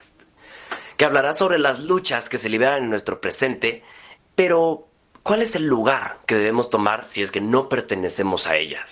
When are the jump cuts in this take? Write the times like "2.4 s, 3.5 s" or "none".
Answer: 4.2 s